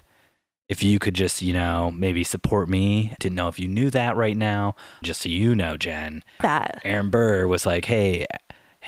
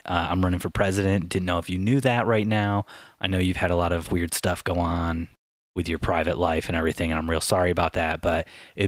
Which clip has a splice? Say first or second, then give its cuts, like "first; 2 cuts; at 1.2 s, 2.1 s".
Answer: first; 3 cuts; at 3.2 s, 5.0 s, 6.4 s